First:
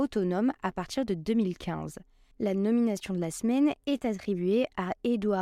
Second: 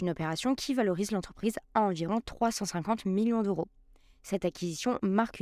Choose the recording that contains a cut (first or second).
first